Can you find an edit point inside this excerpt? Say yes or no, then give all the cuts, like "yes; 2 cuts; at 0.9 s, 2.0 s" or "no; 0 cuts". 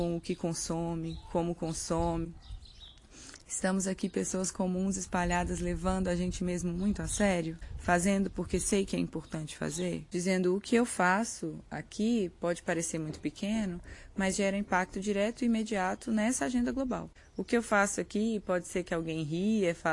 no; 0 cuts